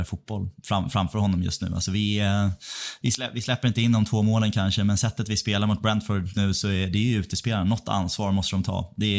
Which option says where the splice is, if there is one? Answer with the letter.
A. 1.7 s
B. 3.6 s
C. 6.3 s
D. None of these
C